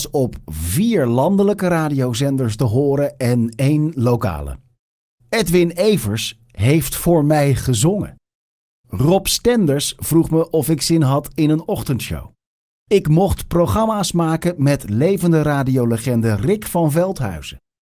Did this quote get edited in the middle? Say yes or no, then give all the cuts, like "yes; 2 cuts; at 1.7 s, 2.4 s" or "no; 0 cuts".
no; 0 cuts